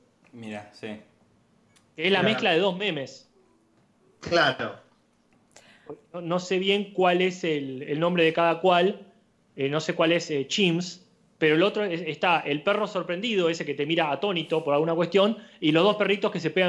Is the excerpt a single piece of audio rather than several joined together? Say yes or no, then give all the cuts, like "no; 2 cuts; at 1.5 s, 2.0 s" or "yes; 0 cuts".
yes; 0 cuts